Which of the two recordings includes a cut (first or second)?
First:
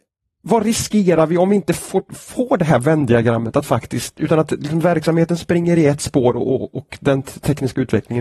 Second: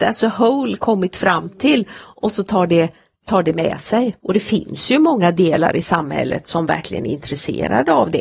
second